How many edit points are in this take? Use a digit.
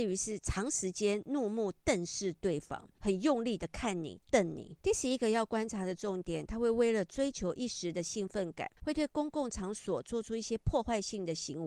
2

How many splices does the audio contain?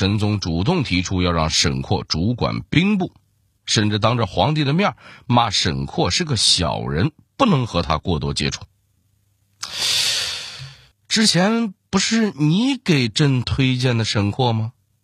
2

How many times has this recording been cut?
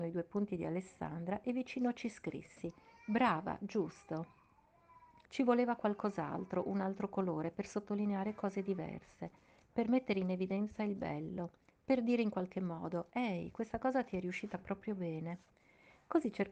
1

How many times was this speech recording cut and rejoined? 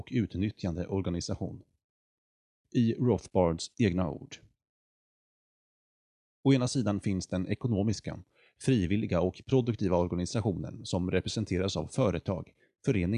2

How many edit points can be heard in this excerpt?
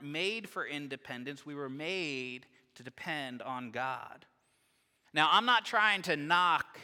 1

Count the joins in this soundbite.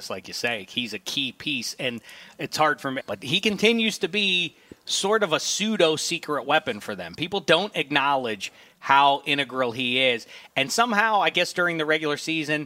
1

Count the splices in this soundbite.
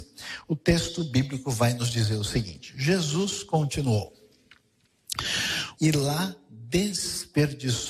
1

